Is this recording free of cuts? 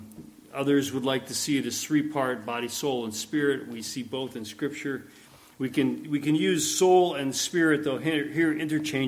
yes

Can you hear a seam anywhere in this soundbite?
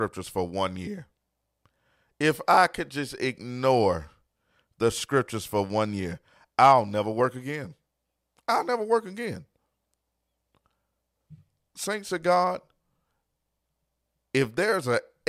no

